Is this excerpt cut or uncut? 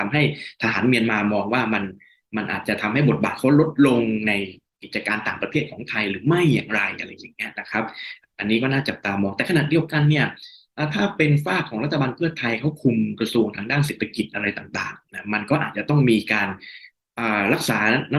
uncut